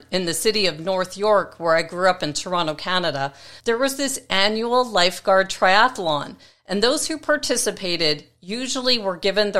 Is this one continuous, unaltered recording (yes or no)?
no